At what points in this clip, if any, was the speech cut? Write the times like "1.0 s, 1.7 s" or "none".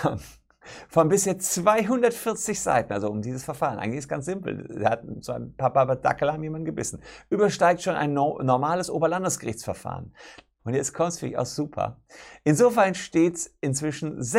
10.6 s